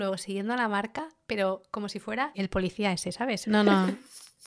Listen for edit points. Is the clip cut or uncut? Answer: cut